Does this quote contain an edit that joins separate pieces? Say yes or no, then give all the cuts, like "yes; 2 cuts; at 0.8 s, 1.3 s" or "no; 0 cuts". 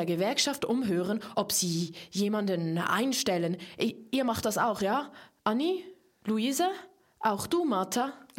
yes; 1 cut; at 1.3 s